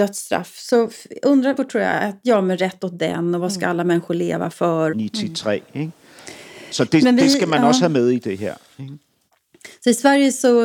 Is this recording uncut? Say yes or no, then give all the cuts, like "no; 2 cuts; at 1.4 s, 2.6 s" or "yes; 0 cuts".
no; 2 cuts; at 1.6 s, 4.9 s